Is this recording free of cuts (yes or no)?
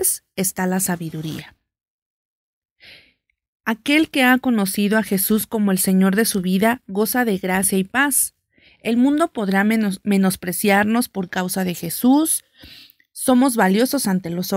yes